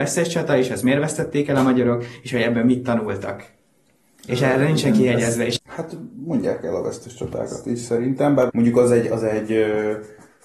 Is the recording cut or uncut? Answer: cut